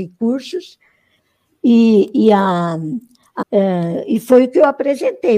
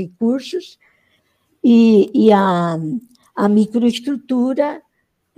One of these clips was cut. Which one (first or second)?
first